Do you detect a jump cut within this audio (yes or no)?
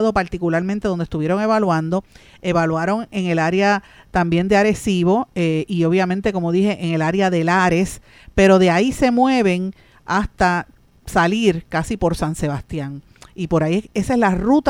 no